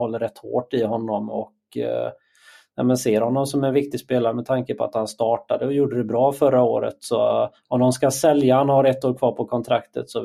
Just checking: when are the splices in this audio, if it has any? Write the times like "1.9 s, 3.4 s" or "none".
none